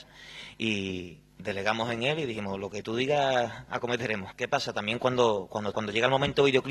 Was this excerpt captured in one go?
no; 2 cuts; at 4.3 s, 5.7 s

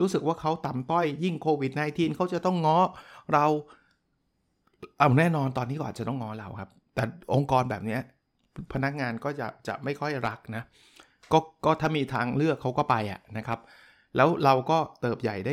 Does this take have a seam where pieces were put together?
no; 0 cuts

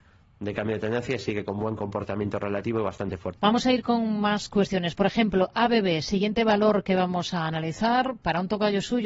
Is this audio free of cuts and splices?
no; 1 cut; at 3.4 s

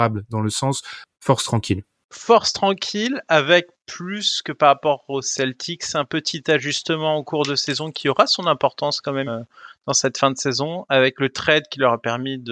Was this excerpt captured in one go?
no; 1 cut; at 9.3 s

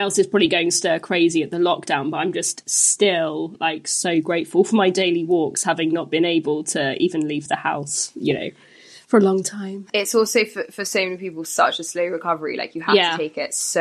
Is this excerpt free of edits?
yes; 0 cuts

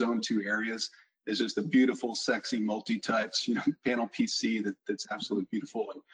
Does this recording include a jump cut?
no; 0 cuts

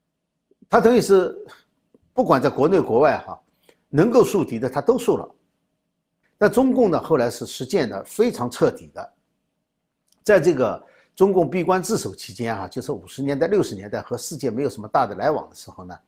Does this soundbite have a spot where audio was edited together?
yes; 1 cut; at 6.2 s

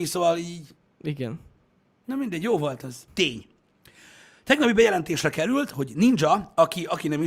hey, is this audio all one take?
no; 1 cut; at 3.1 s

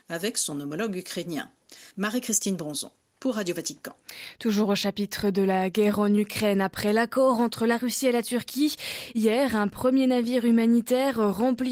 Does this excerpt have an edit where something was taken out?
no; 0 cuts

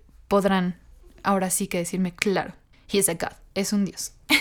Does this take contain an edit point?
yes; 1 cut; at 2.7 s

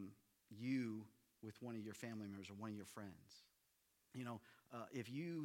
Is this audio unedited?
no; 1 cut; at 4.1 s

